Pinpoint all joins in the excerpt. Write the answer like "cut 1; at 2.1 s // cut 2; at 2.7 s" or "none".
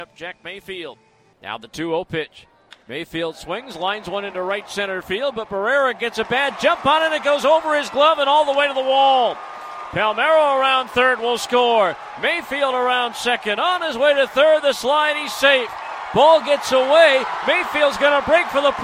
none